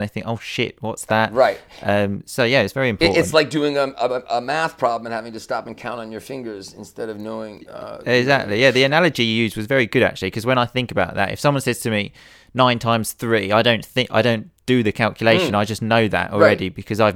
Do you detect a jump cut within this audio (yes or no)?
no